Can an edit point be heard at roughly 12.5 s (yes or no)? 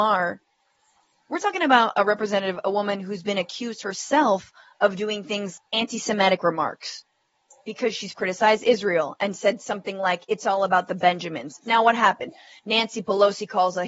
no